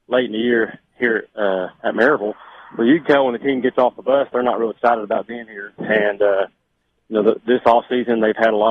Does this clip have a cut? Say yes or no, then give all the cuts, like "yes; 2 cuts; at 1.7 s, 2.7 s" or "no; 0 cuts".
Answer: yes; 1 cut; at 5.8 s